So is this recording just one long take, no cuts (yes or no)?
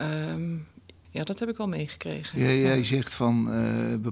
no